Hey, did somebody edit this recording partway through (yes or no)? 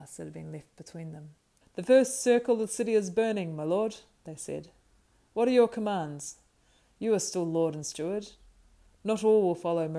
yes